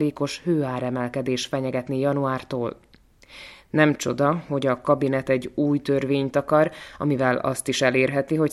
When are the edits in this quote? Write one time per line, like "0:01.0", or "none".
none